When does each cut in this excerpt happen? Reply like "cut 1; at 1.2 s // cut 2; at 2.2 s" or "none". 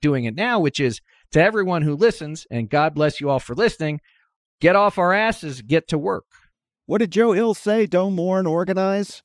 none